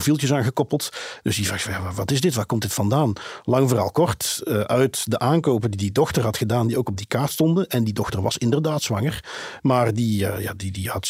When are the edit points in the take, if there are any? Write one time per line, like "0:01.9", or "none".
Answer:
0:01.2
0:09.6

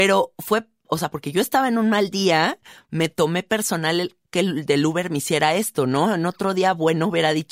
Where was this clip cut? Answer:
none

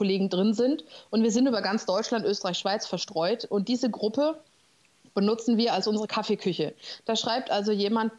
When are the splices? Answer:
none

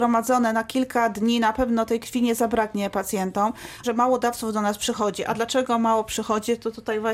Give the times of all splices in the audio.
0:03.8

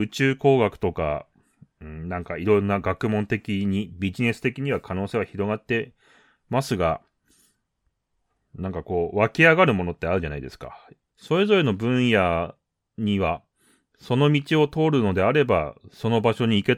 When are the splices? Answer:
0:11.1

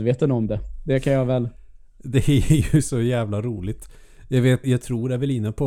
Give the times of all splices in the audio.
0:04.6

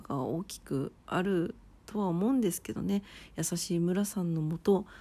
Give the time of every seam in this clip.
0:01.0

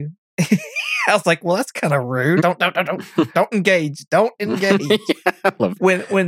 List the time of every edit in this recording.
0:02.4

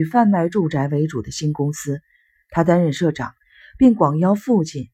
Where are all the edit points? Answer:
none

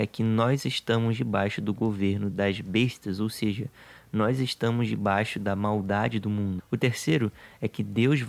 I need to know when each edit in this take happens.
0:06.6

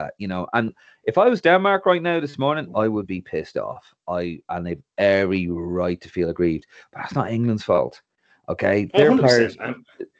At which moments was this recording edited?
none

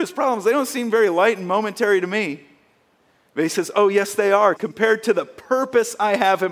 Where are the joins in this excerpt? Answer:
0:04.6

